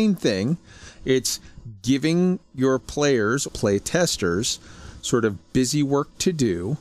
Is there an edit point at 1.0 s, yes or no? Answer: no